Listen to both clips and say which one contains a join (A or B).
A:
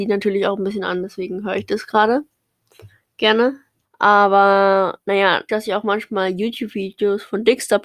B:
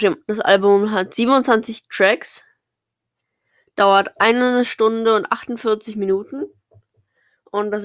A